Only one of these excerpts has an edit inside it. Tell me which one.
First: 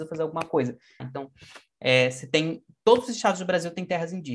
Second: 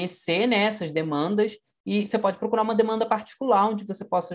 first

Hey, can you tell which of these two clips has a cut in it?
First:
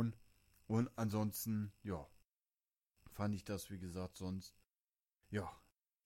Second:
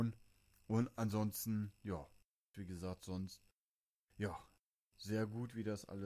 second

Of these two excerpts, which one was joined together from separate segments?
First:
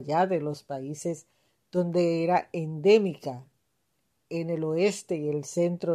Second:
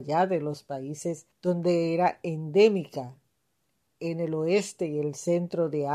second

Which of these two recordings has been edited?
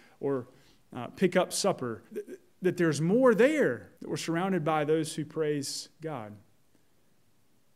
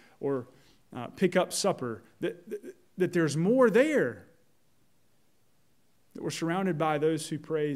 first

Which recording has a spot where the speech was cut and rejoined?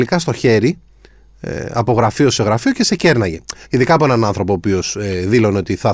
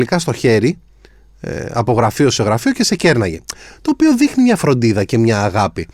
first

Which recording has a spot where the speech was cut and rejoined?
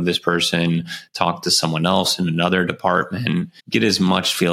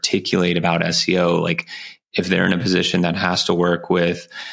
first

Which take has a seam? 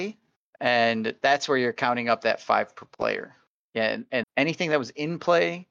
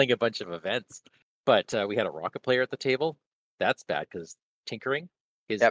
first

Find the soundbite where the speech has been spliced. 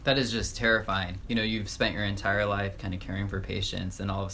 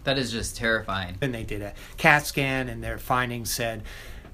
second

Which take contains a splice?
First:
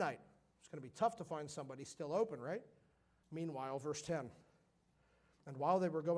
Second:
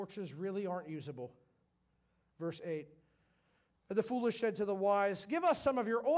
first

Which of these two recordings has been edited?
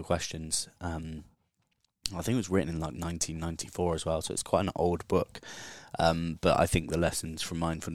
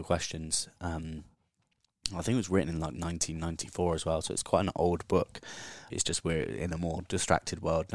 second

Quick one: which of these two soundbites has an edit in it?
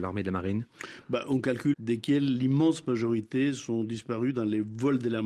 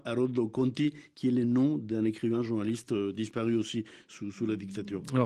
first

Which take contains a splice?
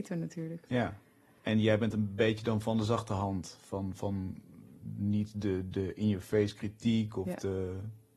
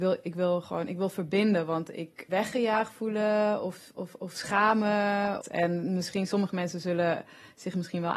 second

